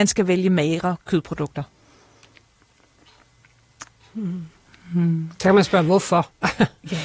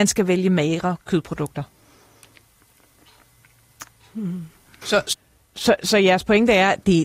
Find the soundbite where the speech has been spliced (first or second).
second